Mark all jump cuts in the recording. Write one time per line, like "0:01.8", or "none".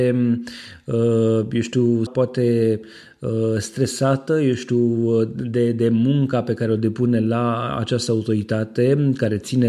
0:02.1

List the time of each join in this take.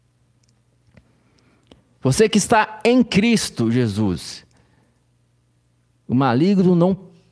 none

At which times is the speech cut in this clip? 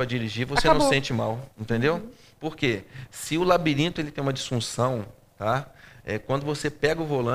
0:01.5

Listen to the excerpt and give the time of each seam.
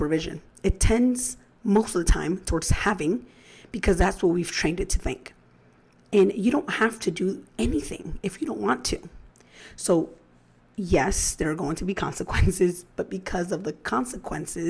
none

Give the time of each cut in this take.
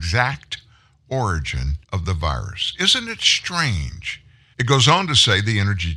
0:01.8
0:04.5

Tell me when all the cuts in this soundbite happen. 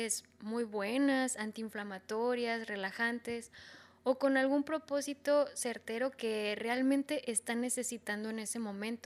none

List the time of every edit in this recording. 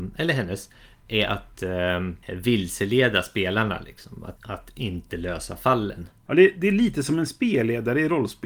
0:02.2
0:04.4

